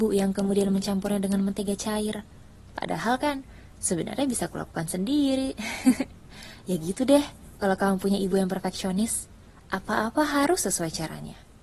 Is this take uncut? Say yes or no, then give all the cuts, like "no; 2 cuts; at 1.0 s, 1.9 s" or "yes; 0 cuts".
yes; 0 cuts